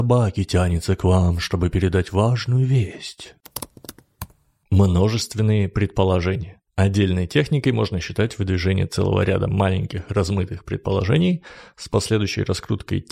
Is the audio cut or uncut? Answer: uncut